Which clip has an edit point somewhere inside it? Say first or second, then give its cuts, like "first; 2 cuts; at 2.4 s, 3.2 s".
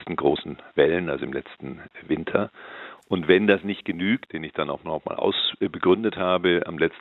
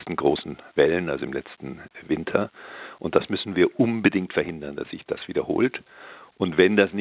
first; 2 cuts; at 3.0 s, 4.3 s